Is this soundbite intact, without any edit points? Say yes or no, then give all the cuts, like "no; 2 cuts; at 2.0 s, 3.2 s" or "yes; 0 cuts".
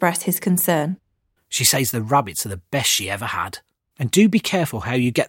no; 2 cuts; at 1.4 s, 3.9 s